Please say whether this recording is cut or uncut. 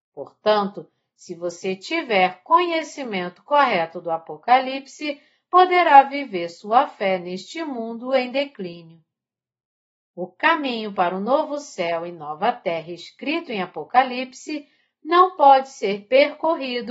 uncut